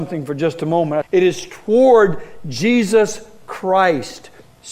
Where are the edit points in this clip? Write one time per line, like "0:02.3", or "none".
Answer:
0:01.0